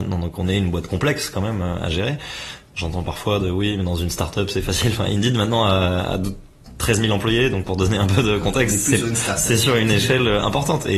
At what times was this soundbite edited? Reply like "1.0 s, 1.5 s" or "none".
none